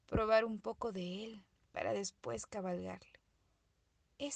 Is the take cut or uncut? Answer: uncut